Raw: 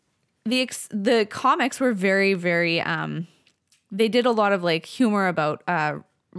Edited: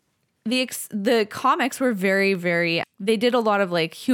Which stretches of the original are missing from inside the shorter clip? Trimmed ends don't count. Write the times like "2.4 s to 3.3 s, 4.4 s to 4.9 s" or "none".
2.8 s to 3.7 s